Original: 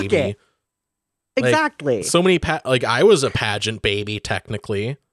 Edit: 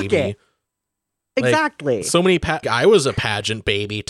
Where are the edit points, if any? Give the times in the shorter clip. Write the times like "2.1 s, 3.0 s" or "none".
2.6 s